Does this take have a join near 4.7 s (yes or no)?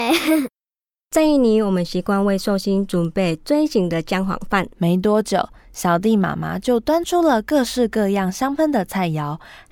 yes